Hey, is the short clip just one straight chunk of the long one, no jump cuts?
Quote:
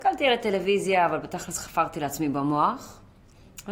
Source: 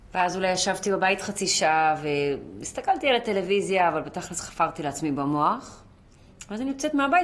yes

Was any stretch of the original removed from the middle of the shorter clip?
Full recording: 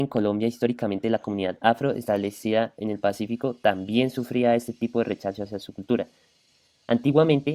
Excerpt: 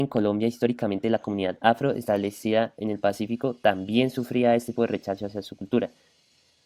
yes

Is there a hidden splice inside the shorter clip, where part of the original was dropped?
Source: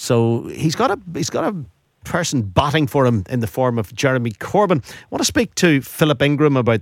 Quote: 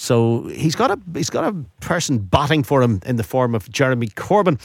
yes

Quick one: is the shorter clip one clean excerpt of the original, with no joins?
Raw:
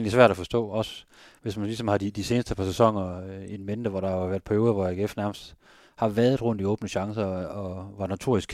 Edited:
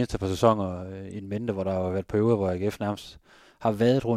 yes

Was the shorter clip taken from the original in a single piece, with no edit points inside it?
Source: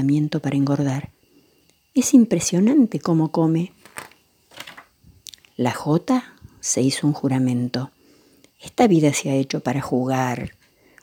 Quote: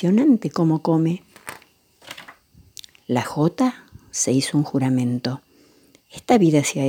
yes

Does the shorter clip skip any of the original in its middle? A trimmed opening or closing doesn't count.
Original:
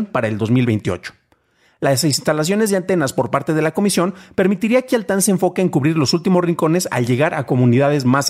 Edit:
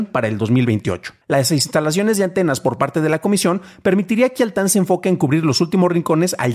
yes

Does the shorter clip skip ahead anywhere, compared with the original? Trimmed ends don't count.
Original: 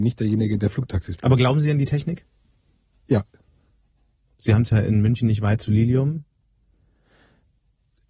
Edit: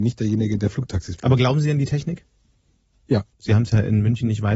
yes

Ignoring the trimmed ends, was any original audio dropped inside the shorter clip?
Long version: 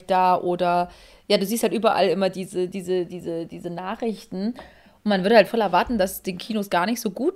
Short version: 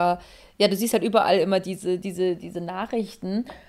yes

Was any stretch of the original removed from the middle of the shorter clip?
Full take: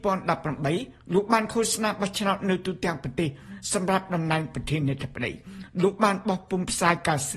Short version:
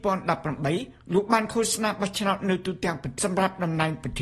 yes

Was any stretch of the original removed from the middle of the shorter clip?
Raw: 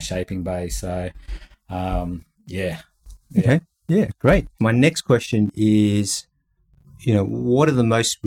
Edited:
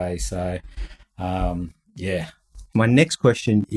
yes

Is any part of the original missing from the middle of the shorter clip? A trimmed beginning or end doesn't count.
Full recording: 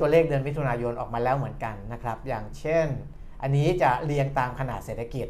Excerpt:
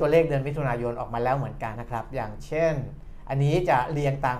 yes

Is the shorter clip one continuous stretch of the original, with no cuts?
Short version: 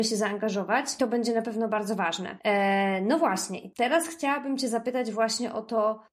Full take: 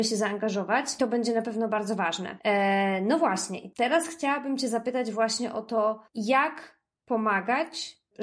yes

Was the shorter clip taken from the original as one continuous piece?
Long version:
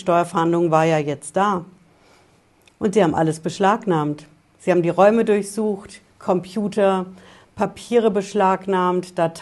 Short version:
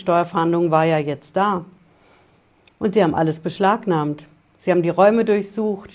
yes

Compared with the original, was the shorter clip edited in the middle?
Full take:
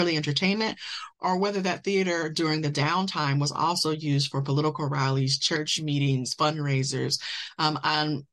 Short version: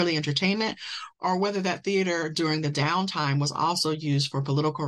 no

